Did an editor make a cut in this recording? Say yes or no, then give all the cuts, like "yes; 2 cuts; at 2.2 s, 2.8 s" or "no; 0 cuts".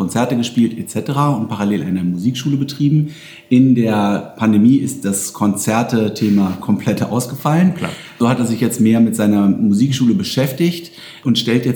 no; 0 cuts